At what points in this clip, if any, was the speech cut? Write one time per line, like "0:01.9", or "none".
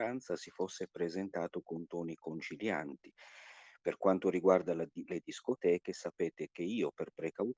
none

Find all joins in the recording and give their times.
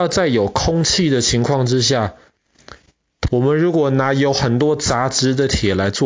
0:03.3

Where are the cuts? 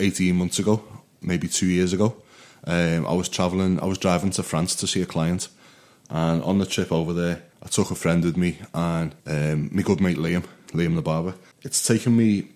0:07.5
0:09.2
0:11.5

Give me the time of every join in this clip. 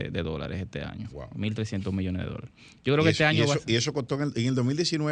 none

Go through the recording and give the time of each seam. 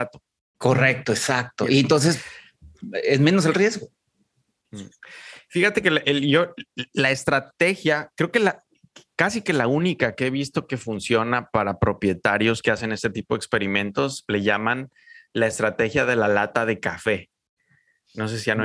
0:06.0

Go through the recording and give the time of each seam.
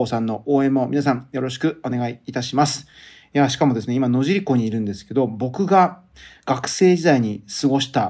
none

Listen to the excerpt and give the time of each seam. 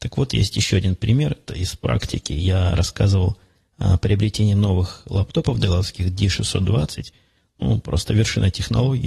0:01.5

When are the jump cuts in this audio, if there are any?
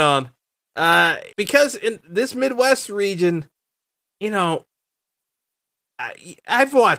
0:01.3

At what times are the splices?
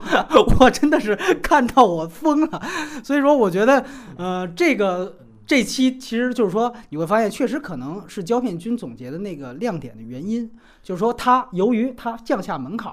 none

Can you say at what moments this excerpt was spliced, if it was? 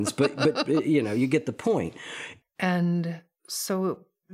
0:02.4

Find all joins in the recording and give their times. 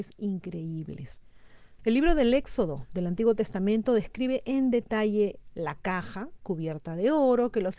0:01.8

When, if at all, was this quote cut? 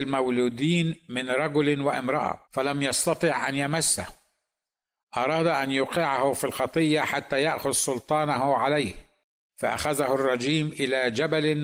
0:02.4

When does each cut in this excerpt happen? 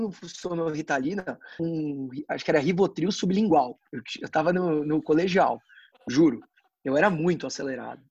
0:01.6

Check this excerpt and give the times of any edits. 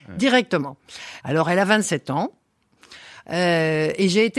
0:01.2
0:03.2

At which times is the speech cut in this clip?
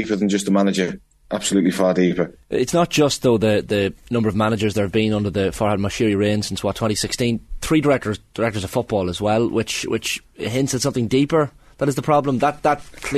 none

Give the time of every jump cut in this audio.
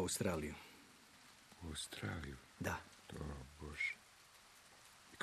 none

